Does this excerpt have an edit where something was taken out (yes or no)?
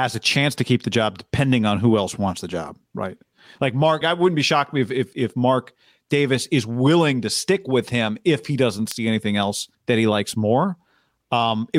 yes